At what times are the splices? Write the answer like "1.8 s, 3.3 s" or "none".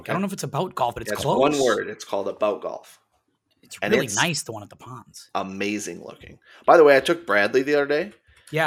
none